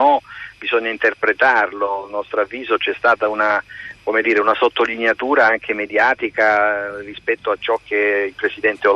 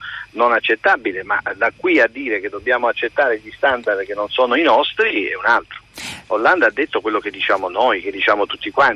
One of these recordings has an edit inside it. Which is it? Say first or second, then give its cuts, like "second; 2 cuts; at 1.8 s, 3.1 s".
second; 2 cuts; at 6.2 s, 8.0 s